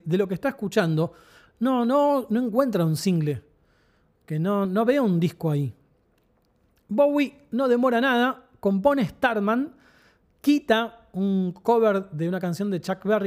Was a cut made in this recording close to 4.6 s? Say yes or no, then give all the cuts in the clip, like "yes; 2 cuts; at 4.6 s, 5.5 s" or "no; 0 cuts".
yes; 1 cut; at 4.6 s